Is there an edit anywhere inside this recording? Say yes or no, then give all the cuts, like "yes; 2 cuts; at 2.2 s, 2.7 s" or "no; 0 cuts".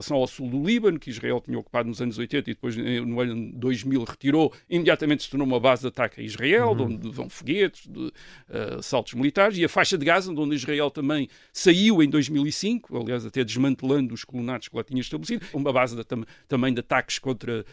yes; 1 cut; at 15.5 s